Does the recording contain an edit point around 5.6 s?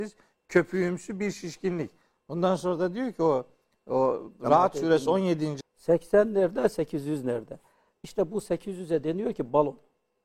yes; 1 cut; at 5.6 s

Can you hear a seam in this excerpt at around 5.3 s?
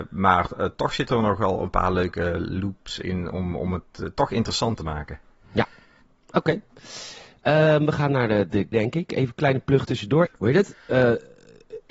no; 2 cuts; at 8.7 s, 10.3 s

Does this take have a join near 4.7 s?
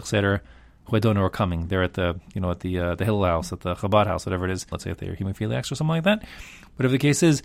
yes; 1 cut; at 4.7 s

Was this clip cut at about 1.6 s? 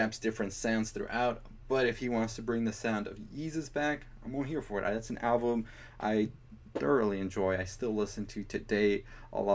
no; 0 cuts

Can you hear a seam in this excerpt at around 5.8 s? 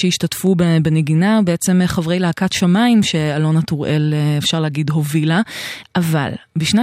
yes; 1 cut; at 5.8 s

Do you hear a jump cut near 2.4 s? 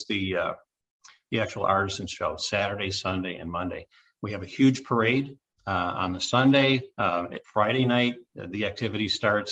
no; 1 cut; at 7.4 s

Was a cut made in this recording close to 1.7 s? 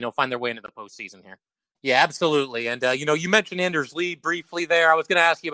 yes; 1 cut; at 1.7 s

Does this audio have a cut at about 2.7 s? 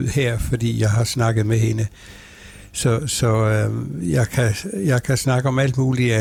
no; 0 cuts

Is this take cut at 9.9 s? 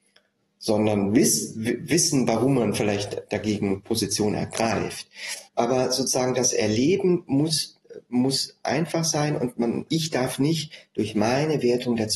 yes; 2 cuts; at 5.5 s, 9.9 s

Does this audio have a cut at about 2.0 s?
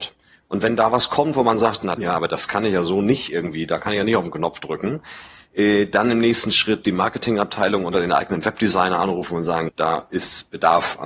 yes; 2 cuts; at 2.0 s, 9.7 s

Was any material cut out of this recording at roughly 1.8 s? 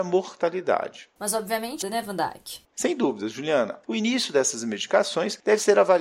yes; 2 cuts; at 1.8 s, 3.8 s

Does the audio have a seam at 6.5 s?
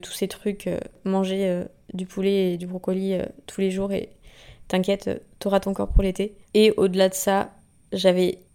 yes; 1 cut; at 6.5 s

